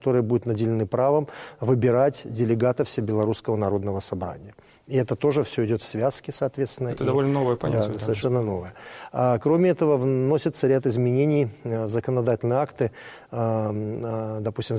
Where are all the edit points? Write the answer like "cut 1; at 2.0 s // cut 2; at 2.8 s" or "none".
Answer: none